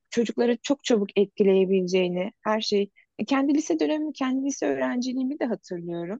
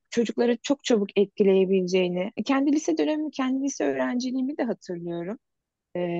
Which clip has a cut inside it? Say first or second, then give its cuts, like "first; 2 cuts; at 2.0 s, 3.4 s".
second; 1 cut; at 2.4 s